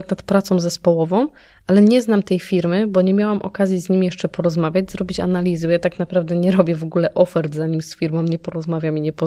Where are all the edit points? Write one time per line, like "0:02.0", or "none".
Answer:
none